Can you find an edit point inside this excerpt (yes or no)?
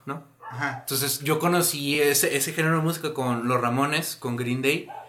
no